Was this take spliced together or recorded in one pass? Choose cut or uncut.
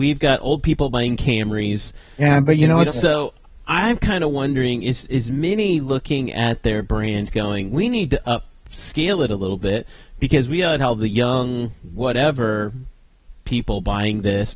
cut